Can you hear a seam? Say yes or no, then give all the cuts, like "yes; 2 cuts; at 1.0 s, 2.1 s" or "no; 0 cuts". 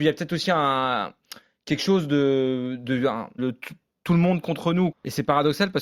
yes; 2 cuts; at 3.4 s, 4.9 s